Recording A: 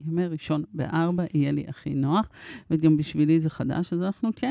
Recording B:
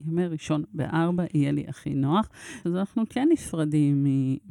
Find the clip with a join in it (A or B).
B